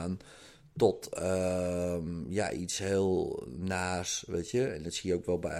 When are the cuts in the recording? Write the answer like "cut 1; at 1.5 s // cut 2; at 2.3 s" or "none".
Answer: none